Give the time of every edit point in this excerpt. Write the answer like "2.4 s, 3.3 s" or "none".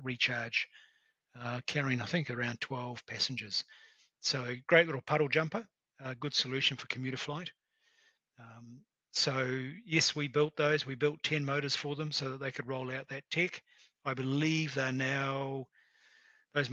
none